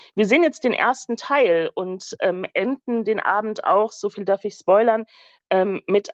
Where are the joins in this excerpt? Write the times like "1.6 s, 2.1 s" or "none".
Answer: none